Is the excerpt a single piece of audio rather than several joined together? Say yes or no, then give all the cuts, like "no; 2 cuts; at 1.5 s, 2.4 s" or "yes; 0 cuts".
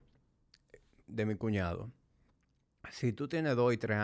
no; 1 cut; at 1.1 s